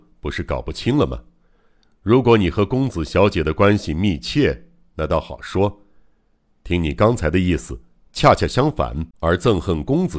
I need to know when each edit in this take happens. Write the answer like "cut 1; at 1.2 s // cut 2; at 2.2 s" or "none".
cut 1; at 9.1 s